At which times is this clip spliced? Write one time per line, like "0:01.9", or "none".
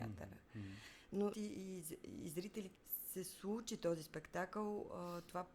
0:01.3
0:02.7